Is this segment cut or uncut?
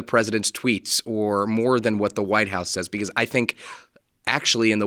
uncut